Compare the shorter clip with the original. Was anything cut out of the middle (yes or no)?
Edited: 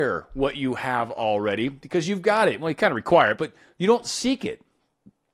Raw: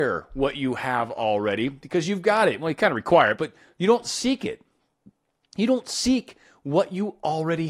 no